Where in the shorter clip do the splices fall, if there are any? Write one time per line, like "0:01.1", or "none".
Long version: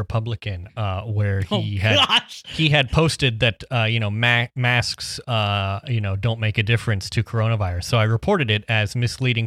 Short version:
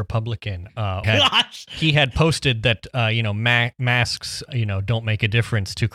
0:01.0
0:04.5